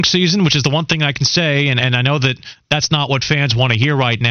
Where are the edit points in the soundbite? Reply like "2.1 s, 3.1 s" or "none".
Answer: none